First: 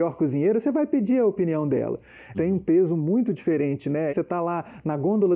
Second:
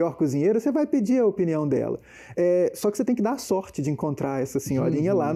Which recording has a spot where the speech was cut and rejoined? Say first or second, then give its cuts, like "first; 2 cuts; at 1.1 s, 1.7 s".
first; 2 cuts; at 2.3 s, 4.1 s